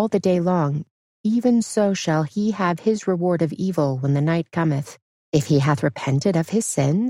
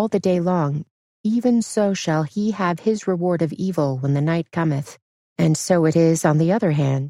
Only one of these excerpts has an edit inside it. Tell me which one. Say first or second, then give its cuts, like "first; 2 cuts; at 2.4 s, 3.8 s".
first; 1 cut; at 5.2 s